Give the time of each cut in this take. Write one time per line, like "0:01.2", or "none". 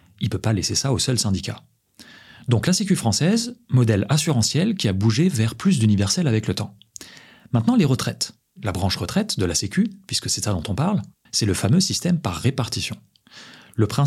0:11.3